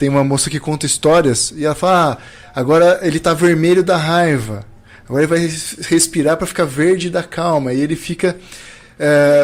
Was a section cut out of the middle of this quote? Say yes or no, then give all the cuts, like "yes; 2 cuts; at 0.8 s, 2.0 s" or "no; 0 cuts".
no; 0 cuts